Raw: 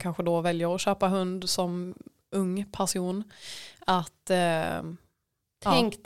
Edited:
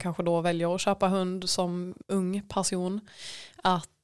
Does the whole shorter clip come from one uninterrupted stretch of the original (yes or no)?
no